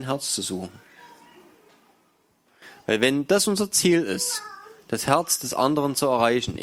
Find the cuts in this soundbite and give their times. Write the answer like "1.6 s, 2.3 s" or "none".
none